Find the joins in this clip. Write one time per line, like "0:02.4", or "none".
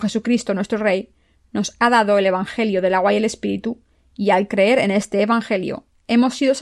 none